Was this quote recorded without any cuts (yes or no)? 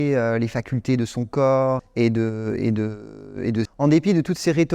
no